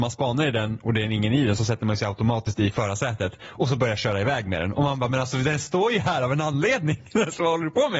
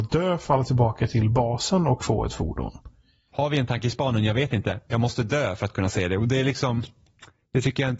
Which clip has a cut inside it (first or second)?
second